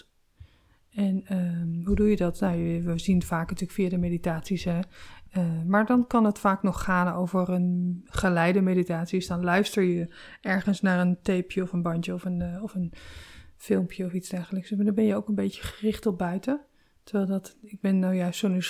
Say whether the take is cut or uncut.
uncut